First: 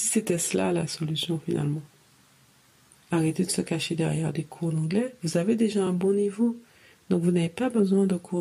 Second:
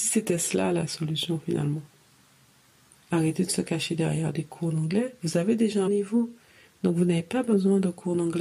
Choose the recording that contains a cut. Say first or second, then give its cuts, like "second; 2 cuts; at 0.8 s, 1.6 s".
second; 1 cut; at 5.9 s